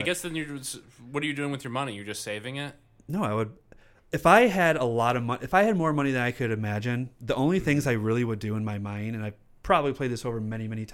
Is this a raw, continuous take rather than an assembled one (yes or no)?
yes